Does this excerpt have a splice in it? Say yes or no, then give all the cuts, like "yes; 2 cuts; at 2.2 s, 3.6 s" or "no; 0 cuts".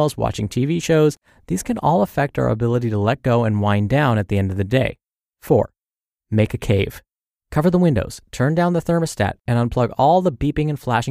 yes; 2 cuts; at 5.3 s, 7.4 s